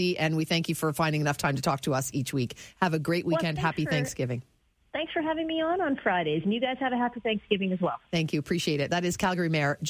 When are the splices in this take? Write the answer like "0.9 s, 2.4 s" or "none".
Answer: none